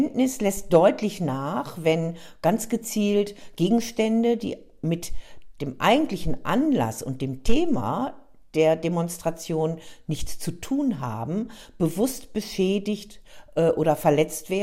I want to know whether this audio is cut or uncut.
uncut